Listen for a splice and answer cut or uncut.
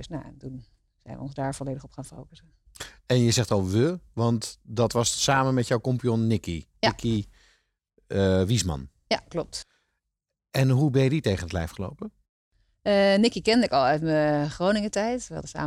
uncut